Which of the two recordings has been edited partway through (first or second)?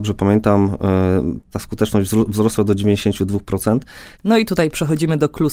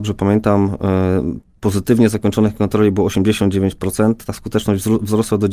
first